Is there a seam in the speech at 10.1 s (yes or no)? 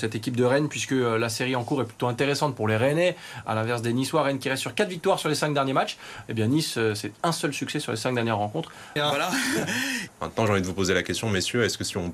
yes